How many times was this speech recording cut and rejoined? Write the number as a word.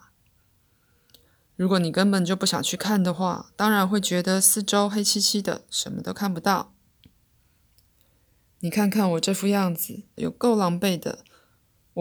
one